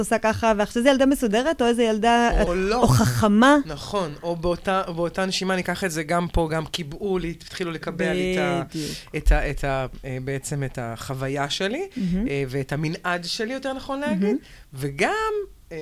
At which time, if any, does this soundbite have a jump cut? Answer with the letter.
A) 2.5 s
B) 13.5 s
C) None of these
A